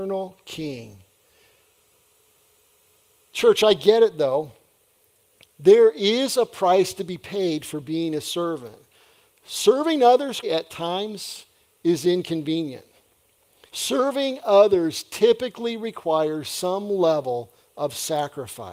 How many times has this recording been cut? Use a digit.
2